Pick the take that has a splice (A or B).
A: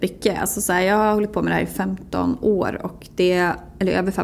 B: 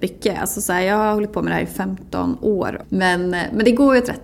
B